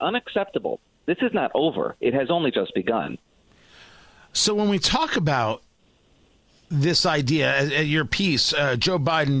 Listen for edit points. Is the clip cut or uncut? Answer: uncut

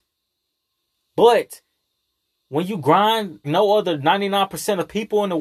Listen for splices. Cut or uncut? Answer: cut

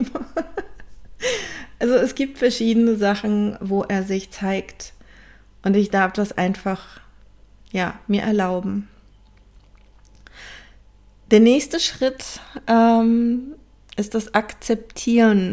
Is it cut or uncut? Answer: uncut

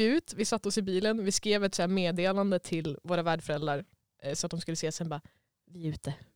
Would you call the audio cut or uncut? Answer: uncut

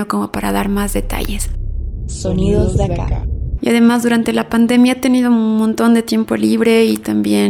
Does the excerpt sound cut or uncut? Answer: cut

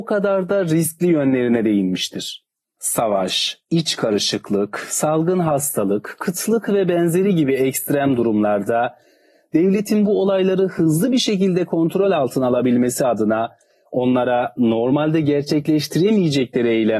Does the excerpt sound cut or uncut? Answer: cut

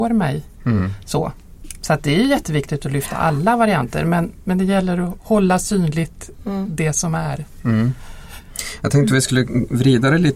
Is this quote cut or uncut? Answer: uncut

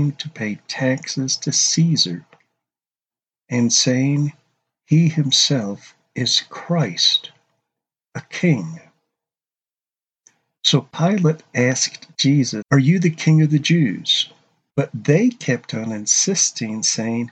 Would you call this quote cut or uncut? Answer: cut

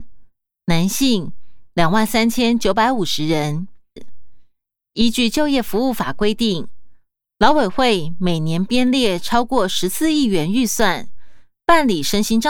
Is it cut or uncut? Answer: cut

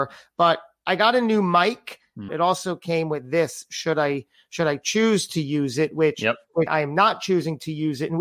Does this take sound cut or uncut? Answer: cut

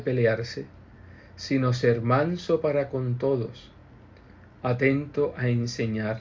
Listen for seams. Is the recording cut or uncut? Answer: uncut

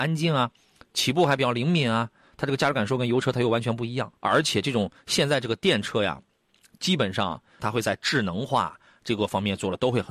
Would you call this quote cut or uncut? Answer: cut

